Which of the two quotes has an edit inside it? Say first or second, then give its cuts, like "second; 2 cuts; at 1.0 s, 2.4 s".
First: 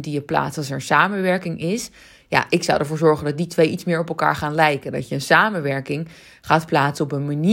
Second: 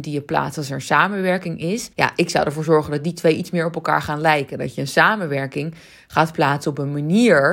second; 1 cut; at 1.9 s